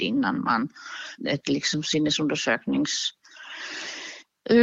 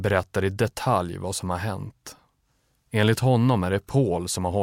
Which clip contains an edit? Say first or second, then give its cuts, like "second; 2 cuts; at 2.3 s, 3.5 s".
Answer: first; 1 cut; at 1.2 s